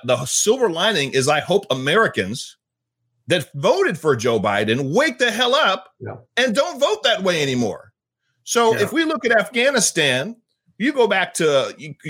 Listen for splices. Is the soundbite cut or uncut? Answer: uncut